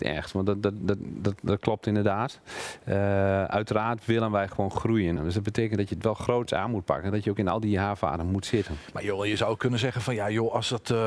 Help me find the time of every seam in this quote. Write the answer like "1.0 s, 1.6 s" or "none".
5.2 s